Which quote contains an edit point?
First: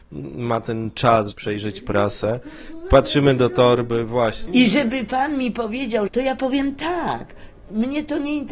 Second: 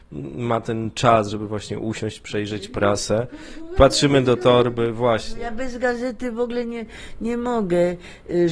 first; 3 cuts; at 1.3 s, 4.5 s, 6.1 s

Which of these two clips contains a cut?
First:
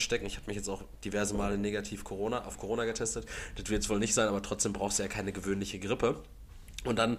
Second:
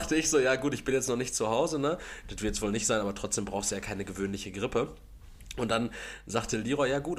second; 1 cut; at 2.2 s

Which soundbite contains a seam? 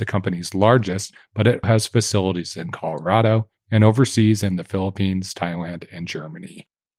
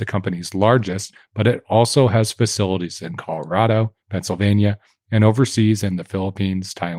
first; 2 cuts; at 1.6 s, 3.6 s

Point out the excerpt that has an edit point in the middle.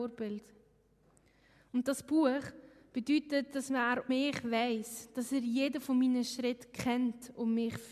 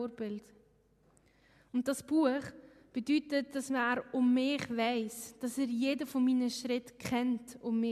first; 1 cut; at 4.1 s

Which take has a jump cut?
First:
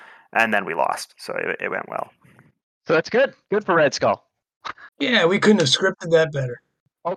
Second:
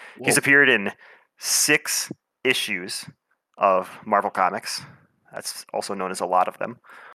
first; 1 cut; at 4.9 s

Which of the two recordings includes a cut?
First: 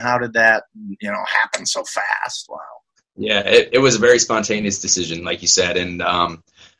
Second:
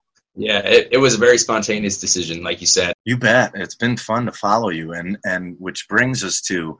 second; 1 cut; at 2.9 s

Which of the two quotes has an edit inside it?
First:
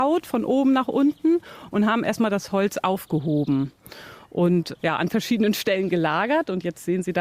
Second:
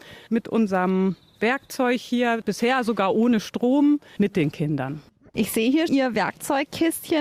second; 2 cuts; at 4.2 s, 5.9 s

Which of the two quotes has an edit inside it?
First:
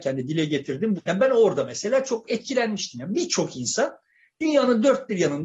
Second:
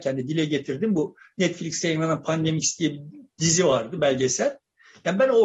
first; 1 cut; at 1.0 s

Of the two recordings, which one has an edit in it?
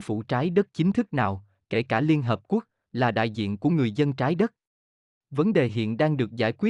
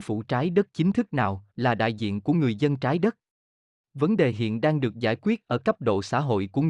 second; 1 cut; at 1.5 s

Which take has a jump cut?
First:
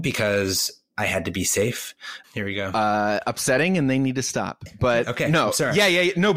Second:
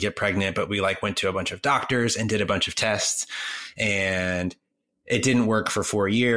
first; 1 cut; at 2.2 s

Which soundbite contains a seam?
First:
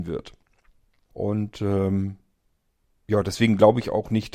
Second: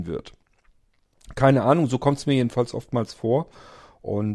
first; 1 cut; at 1.1 s

